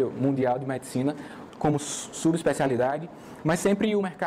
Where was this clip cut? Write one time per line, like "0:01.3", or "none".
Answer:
0:01.5